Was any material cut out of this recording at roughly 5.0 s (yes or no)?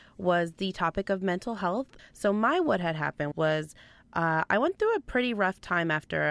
no